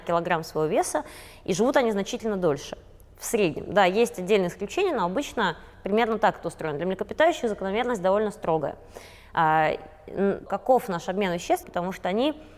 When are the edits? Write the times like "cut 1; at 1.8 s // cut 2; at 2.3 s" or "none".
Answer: cut 1; at 10.5 s // cut 2; at 11.6 s